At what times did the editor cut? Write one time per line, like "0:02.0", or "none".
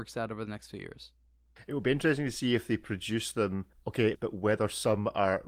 0:04.1

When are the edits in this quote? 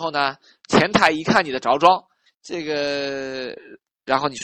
0:02.3

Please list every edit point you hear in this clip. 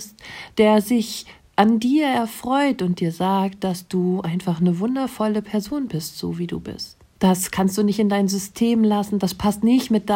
0:07.2

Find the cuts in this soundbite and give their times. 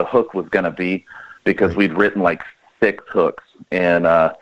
none

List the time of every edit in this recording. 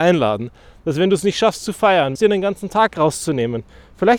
0:02.2

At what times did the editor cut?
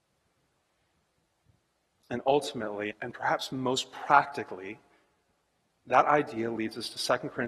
0:02.9

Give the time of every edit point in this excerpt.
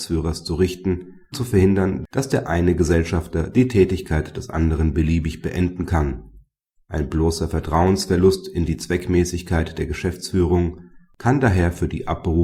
0:01.3

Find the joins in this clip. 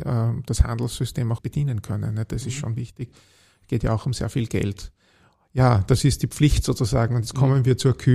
0:01.4

